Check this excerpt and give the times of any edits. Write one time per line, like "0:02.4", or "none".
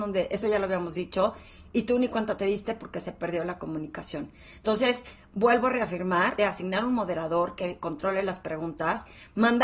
0:06.4